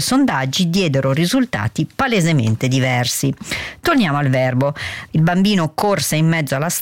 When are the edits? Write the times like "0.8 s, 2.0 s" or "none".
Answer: 5.1 s